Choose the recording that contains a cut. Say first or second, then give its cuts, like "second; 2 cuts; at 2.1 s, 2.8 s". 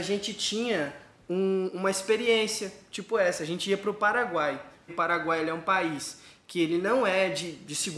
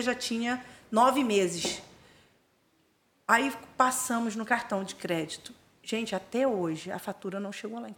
first; 1 cut; at 4.9 s